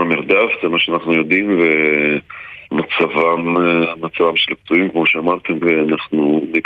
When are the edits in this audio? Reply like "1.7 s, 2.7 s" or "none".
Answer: 2.6 s, 5.6 s